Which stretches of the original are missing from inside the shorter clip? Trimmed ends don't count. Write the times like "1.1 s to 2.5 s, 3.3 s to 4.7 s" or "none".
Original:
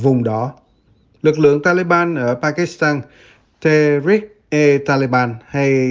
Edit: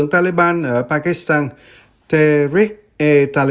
none